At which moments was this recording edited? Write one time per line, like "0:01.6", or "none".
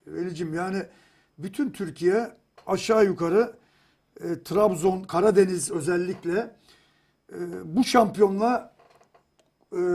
none